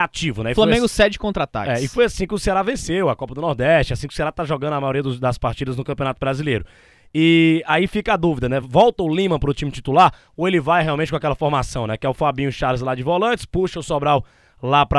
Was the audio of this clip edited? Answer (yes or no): no